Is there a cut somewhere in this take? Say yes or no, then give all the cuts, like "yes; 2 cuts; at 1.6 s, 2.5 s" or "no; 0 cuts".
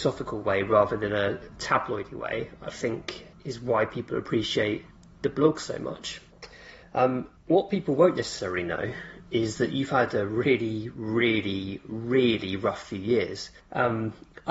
no; 0 cuts